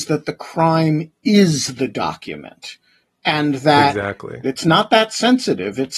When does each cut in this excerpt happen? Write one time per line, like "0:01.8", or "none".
0:04.4